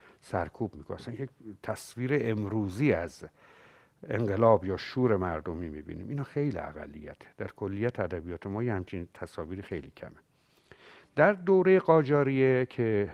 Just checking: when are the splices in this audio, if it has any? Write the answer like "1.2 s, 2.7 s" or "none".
none